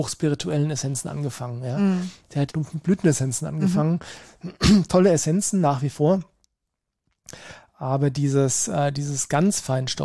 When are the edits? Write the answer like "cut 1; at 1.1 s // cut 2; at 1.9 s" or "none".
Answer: cut 1; at 2.5 s